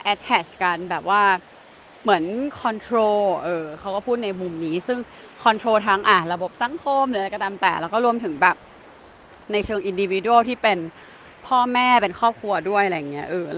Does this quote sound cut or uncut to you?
uncut